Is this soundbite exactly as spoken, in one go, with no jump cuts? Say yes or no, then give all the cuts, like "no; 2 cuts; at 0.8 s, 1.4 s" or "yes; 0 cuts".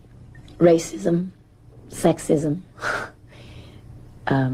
yes; 0 cuts